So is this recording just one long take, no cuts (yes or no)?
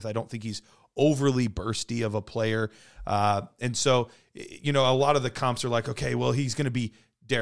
yes